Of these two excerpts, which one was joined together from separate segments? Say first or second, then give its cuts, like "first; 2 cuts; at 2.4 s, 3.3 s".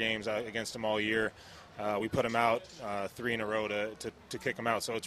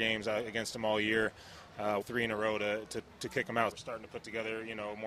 second; 2 cuts; at 2.0 s, 3.7 s